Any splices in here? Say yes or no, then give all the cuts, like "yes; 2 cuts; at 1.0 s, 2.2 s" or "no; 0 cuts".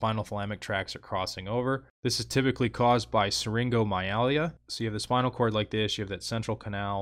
yes; 1 cut; at 4.7 s